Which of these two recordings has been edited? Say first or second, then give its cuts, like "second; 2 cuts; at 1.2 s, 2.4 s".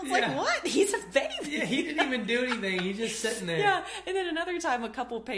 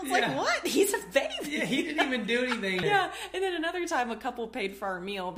second; 1 cut; at 2.8 s